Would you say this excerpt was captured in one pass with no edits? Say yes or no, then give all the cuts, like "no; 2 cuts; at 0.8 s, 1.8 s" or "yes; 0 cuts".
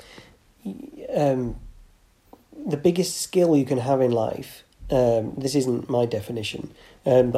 yes; 0 cuts